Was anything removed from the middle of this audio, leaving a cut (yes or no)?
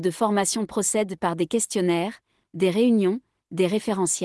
yes